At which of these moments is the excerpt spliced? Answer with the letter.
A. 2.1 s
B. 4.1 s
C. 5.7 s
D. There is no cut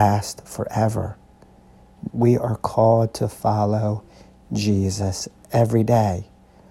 A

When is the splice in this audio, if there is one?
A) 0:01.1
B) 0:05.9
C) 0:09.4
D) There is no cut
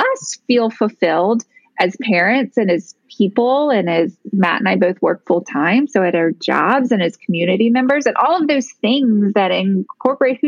D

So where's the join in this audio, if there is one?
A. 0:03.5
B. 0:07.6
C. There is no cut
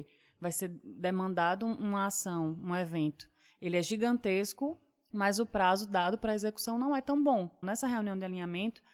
B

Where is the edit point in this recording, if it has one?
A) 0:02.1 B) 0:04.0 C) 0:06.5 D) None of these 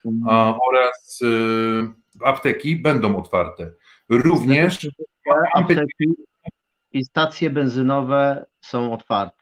A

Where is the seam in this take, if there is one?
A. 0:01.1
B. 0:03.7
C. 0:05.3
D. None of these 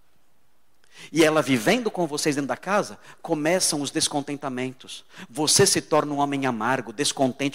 D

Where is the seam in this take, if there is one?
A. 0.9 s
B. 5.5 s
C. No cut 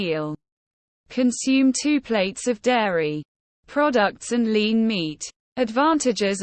A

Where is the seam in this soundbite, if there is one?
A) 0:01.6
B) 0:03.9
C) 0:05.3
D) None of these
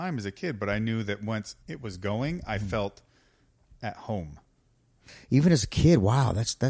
A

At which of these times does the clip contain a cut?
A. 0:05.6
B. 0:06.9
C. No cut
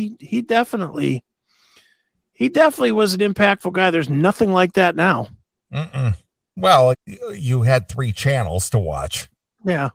B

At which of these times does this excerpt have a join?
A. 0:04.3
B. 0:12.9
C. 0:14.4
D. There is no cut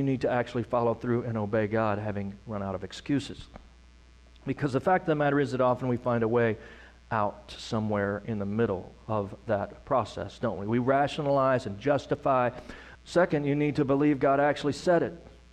B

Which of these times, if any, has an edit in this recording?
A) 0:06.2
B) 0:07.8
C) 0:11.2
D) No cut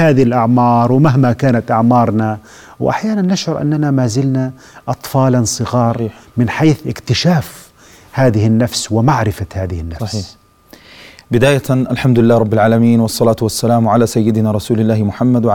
D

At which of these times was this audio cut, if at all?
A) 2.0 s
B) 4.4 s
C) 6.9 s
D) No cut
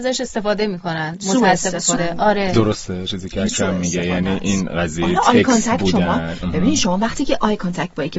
A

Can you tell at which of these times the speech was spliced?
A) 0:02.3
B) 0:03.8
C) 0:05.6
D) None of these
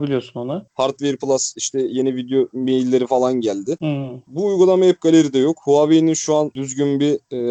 B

